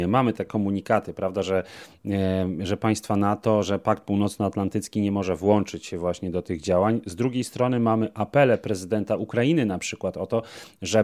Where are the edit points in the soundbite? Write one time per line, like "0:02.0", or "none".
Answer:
none